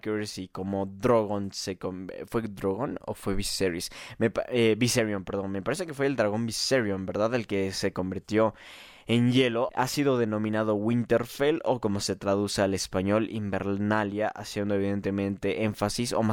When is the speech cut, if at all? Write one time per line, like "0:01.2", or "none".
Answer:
0:09.7